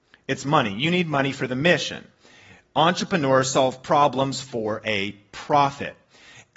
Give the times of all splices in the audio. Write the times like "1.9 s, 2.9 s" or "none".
none